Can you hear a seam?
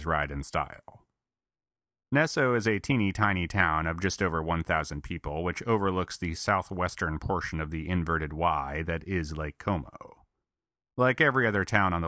no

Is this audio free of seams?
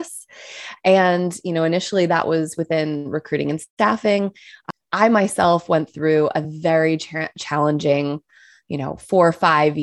yes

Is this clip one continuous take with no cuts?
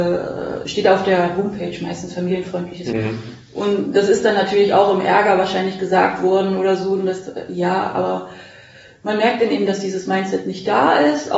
no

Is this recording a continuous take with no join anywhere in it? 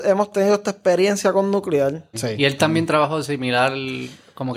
no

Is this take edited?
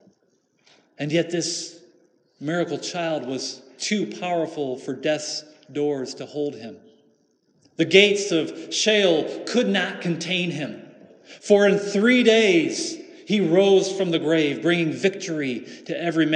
no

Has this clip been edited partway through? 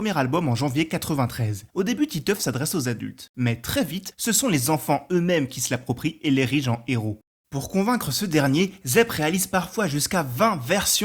yes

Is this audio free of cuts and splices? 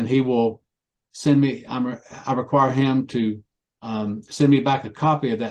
yes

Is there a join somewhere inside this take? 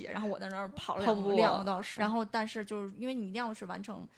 yes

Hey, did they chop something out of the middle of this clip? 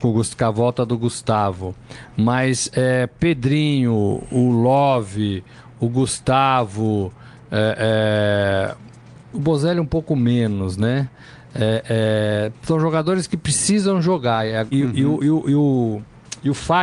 yes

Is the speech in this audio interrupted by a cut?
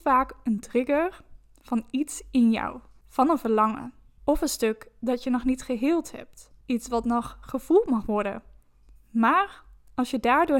no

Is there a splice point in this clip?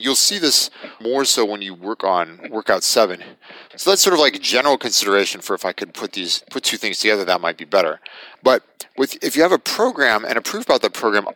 yes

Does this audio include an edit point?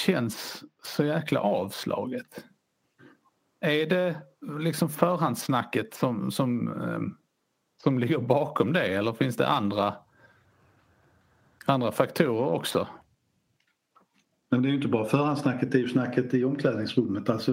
no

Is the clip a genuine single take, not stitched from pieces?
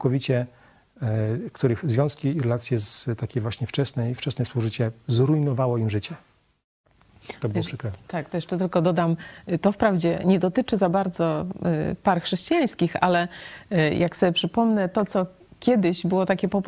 yes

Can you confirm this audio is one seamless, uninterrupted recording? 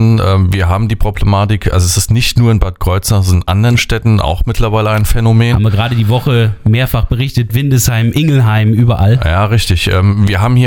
no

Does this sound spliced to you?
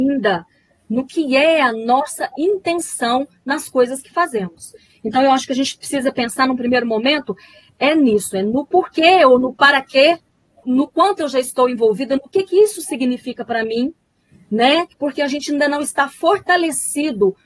yes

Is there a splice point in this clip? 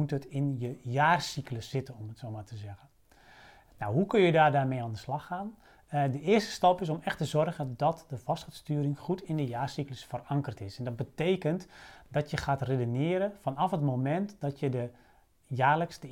no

